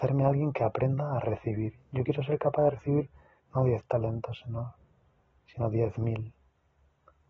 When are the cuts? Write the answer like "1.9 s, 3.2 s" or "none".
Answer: none